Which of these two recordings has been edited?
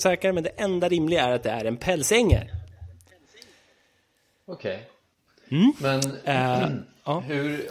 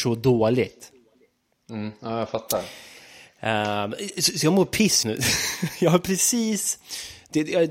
second; 1 cut; at 5.0 s

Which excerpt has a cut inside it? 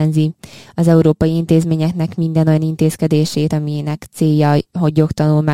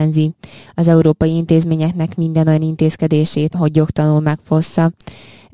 second; 1 cut; at 3.5 s

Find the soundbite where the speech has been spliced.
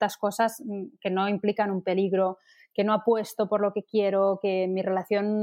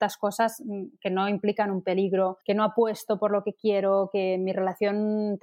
second; 1 cut; at 2.4 s

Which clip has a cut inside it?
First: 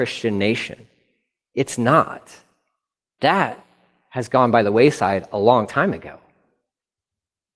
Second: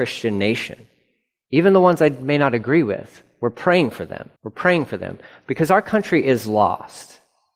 second; 2 cuts; at 1.4 s, 4.4 s

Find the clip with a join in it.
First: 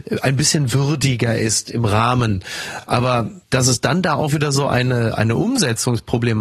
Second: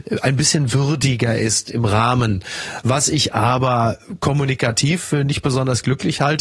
second; 1 cut; at 2.8 s

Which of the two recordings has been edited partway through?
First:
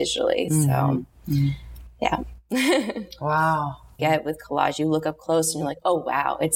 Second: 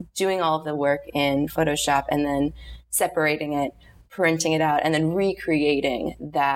first; 1 cut; at 4.0 s

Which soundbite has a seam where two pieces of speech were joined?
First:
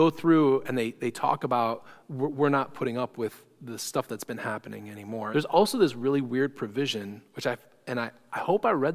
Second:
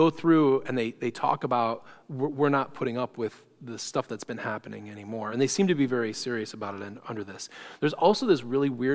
first; 1 cut; at 5.3 s

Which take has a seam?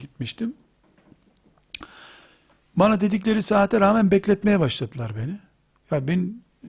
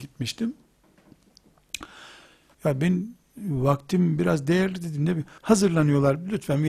second; 2 cuts; at 2.5 s, 5.4 s

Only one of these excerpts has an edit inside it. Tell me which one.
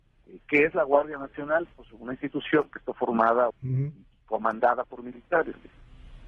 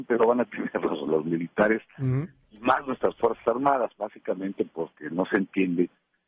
first; 1 cut; at 3.5 s

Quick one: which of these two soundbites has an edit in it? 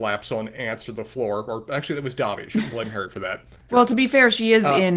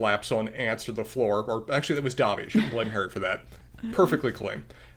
first; 1 cut; at 3.7 s

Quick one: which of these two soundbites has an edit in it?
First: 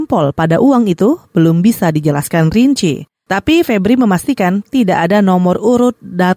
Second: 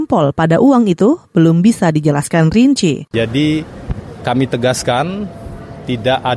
second; 2 cuts; at 3.1 s, 4.2 s

